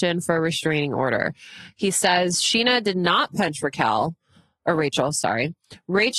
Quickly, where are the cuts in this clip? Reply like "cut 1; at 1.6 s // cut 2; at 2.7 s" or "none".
none

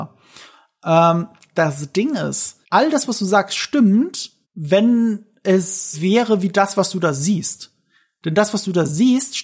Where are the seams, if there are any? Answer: cut 1; at 2.6 s // cut 2; at 4.4 s // cut 3; at 5.9 s

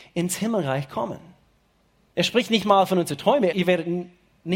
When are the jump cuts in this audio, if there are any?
cut 1; at 2.1 s // cut 2; at 3.5 s

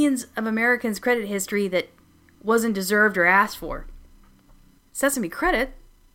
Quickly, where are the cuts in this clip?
cut 1; at 4.8 s

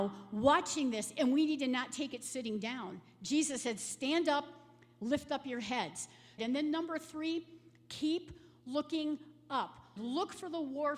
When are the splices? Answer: cut 1; at 6.4 s // cut 2; at 10.0 s

